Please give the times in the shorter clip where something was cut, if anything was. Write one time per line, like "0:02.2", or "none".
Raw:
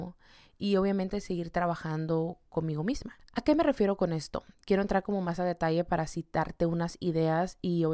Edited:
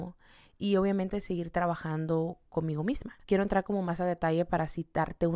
0:03.3